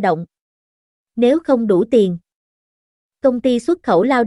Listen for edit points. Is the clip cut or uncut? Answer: uncut